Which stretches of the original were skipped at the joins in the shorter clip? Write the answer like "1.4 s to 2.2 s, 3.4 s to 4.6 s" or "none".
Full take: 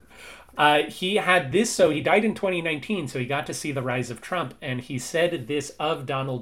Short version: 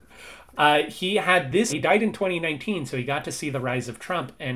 1.7 s to 1.9 s